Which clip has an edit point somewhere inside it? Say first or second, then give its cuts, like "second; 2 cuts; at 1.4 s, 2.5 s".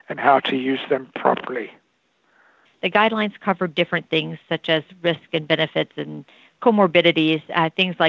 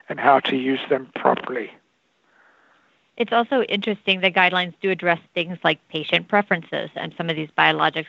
first; 1 cut; at 2.7 s